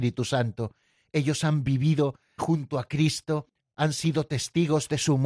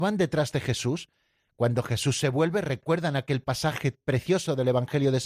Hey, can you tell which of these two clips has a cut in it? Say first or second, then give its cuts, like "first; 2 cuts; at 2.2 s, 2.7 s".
first; 1 cut; at 2.4 s